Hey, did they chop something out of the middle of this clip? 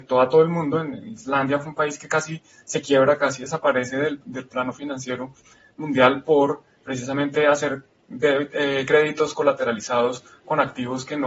no; 0 cuts

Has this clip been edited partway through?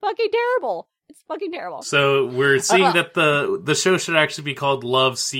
no; 0 cuts

